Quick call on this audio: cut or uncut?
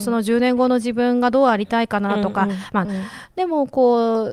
cut